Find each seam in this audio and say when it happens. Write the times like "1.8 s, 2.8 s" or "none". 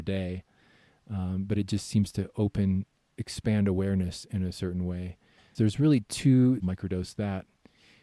5.5 s, 6.6 s